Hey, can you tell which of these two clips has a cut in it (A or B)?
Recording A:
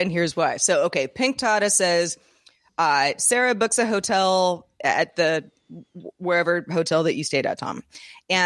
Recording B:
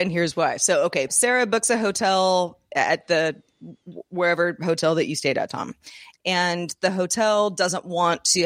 B